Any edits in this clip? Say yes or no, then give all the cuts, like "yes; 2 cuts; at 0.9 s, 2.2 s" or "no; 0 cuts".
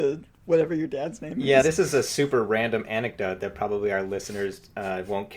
no; 0 cuts